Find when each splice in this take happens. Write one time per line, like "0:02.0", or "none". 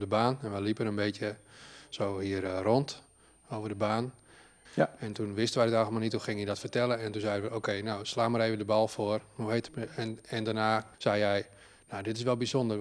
0:04.7
0:09.7
0:10.9